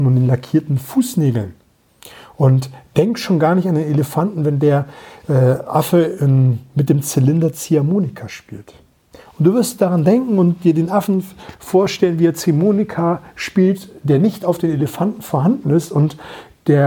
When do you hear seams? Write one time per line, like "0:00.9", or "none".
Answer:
none